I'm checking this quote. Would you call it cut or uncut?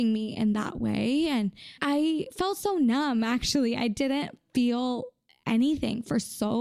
uncut